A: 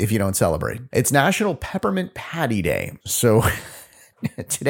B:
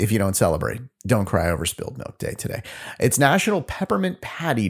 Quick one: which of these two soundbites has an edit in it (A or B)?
A